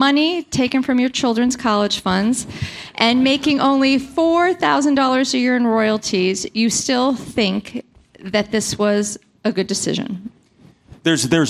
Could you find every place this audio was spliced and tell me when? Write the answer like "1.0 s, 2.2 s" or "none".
none